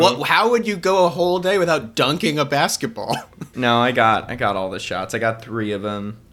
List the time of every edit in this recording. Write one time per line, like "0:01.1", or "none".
0:03.5